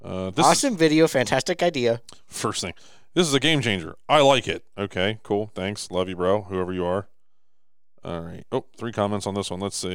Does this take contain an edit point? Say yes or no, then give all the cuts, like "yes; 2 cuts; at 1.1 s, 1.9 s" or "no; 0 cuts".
no; 0 cuts